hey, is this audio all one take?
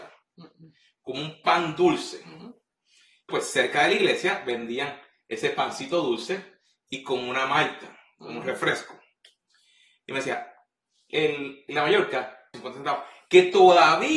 no; 3 cuts; at 3.3 s, 11.1 s, 12.5 s

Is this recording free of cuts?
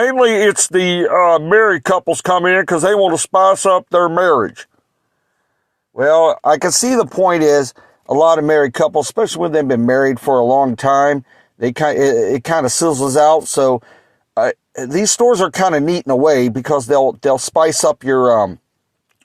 yes; 0 cuts

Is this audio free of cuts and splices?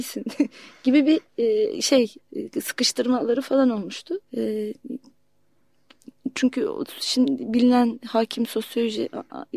no; 2 cuts; at 2.2 s, 4.2 s

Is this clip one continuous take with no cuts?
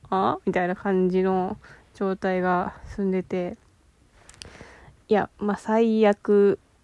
no; 1 cut; at 5.3 s

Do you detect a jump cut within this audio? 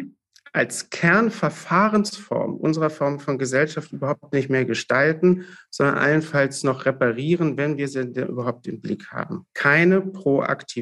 no; 0 cuts

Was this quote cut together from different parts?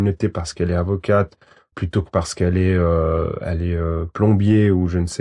yes; 1 cut; at 1.7 s

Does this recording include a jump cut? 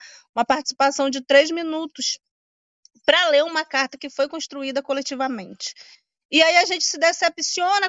no; 0 cuts

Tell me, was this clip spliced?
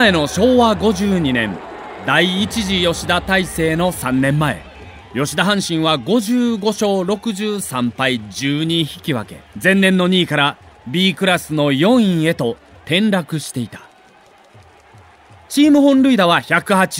yes; 2 cuts; at 5.0 s, 9.5 s

